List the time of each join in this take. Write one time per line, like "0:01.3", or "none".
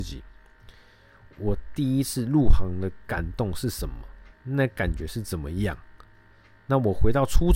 0:04.3

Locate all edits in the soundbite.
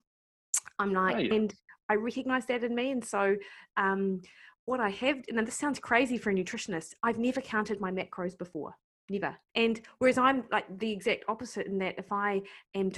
0:01.3
0:09.5

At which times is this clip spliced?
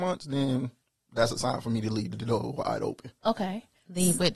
0:03.2

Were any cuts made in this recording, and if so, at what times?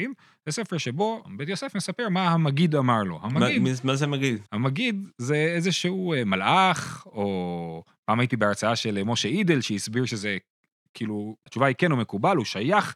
0:11.5

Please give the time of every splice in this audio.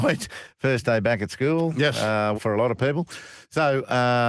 0:02.3

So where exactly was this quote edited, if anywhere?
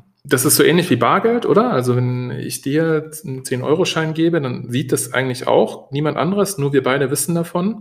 none

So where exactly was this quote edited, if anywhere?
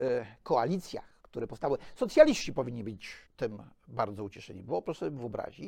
0:03.3

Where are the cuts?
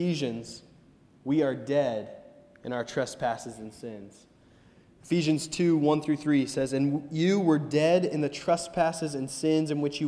none

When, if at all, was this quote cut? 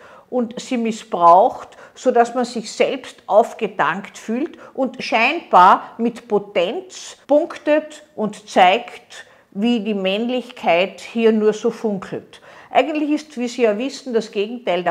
0:07.2

